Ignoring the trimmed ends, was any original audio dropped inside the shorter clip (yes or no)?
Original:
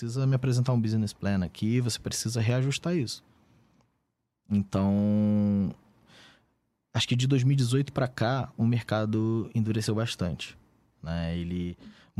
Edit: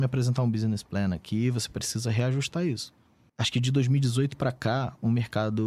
yes